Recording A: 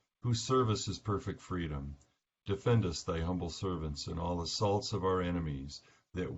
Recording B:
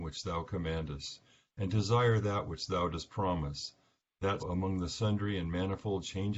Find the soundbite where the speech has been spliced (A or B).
B